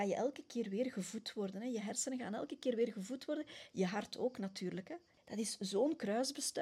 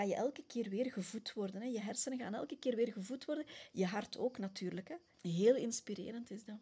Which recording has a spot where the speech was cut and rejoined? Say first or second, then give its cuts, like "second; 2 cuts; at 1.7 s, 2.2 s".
first; 1 cut; at 5.2 s